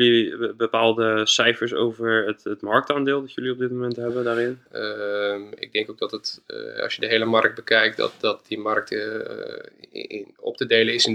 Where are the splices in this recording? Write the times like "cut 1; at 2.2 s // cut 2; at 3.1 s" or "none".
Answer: cut 1; at 4.7 s